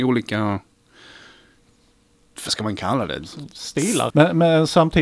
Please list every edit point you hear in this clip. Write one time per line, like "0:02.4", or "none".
0:04.1